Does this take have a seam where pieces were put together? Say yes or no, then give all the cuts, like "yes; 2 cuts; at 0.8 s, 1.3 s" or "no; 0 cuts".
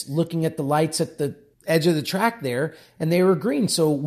yes; 1 cut; at 1.5 s